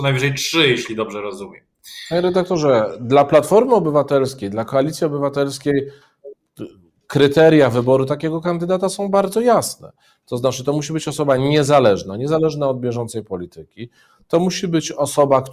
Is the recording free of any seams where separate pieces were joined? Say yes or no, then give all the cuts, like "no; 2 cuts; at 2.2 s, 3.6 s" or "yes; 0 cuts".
yes; 0 cuts